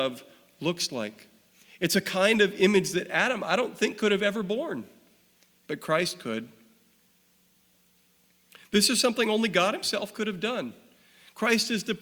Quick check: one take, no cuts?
yes; 0 cuts

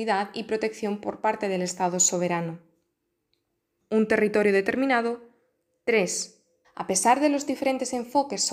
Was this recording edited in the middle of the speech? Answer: yes; 2 cuts; at 3.8 s, 6.6 s

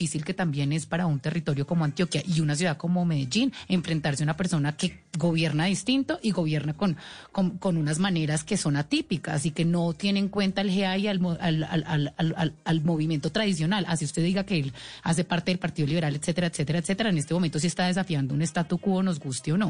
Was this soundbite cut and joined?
no; 0 cuts

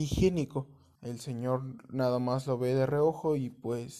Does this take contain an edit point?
yes; 1 cut; at 1.0 s

